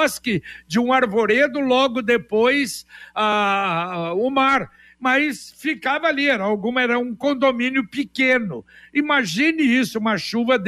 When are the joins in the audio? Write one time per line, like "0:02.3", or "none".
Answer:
none